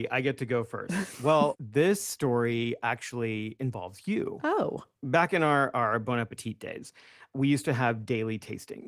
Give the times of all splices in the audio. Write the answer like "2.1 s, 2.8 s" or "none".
1.5 s